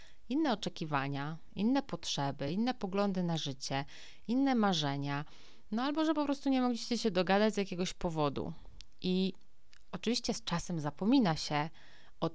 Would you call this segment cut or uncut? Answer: uncut